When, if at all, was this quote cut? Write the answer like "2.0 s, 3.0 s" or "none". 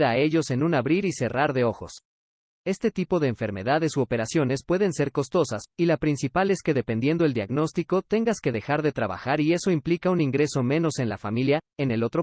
2.6 s, 5.7 s